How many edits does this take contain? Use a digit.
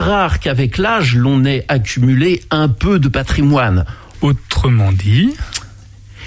1